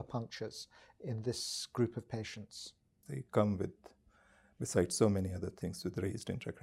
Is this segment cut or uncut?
cut